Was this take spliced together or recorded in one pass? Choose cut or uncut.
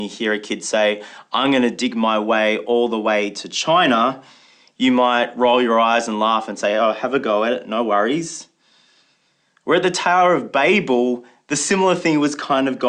uncut